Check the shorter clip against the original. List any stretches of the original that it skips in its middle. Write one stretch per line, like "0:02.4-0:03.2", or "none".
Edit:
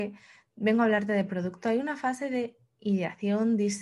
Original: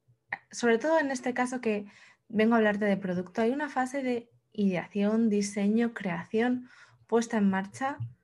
none